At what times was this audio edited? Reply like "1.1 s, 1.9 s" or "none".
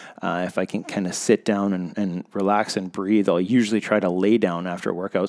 none